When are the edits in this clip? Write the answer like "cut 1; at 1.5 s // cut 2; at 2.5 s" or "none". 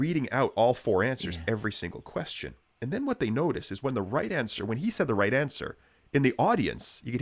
none